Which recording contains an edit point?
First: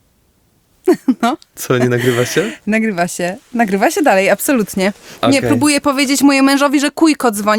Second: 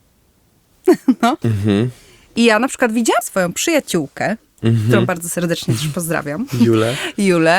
second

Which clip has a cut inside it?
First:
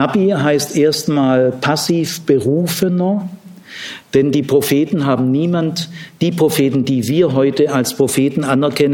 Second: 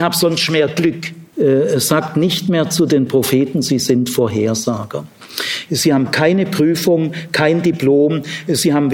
second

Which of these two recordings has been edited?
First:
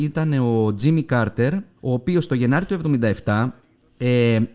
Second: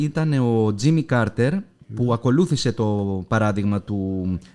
first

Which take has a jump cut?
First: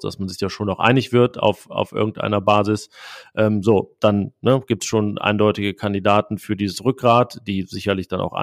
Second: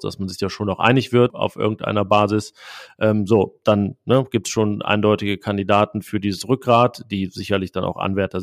second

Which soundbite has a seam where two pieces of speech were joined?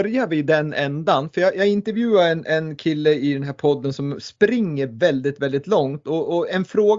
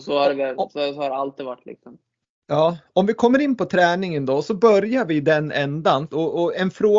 second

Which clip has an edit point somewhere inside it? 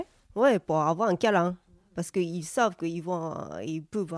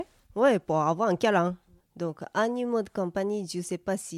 second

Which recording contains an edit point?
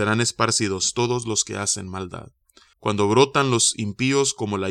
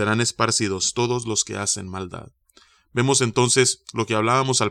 first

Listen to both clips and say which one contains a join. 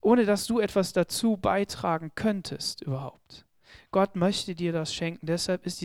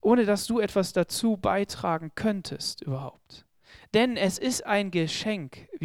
second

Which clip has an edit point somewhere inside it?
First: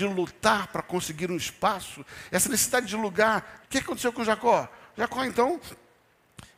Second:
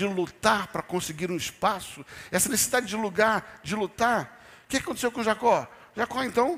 first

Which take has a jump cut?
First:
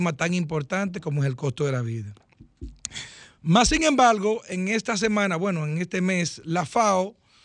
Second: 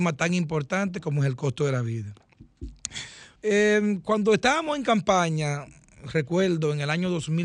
second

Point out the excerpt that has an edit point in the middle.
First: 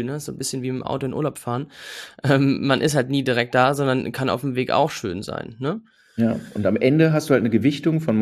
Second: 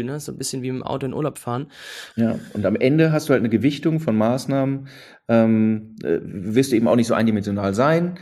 second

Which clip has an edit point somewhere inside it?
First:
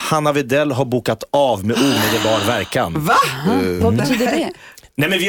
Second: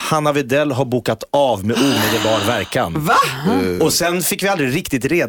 first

